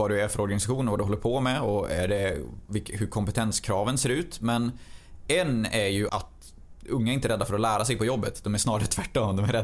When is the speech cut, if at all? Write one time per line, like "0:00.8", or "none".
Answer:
0:06.1